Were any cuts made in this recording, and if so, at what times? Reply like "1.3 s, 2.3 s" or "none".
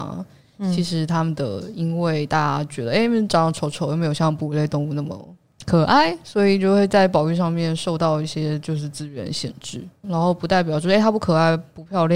10.0 s